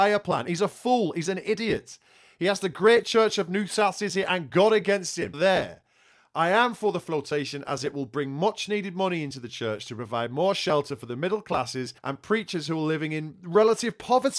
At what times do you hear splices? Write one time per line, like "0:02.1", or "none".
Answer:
0:05.3
0:12.0